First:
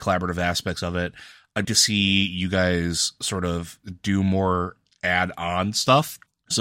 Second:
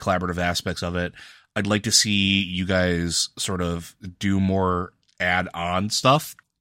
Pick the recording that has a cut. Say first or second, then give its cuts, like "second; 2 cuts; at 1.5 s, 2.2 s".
first; 1 cut; at 1.6 s